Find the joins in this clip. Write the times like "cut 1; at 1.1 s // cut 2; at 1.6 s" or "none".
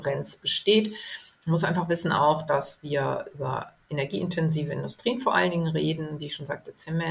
none